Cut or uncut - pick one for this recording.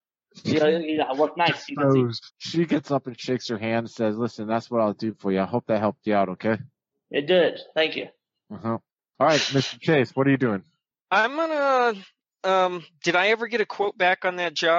cut